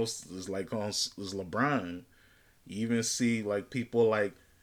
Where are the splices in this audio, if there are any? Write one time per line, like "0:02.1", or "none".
none